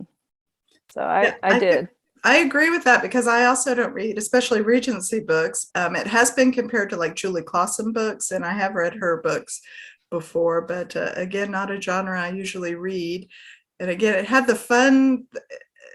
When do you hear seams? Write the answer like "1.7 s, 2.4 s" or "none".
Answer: 5.7 s